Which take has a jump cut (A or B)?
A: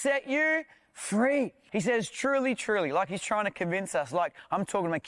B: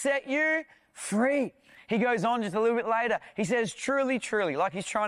A